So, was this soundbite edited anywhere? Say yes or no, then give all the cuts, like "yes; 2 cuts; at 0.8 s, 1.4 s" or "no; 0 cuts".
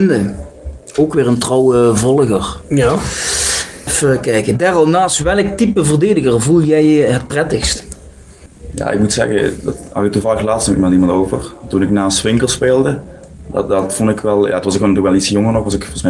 no; 0 cuts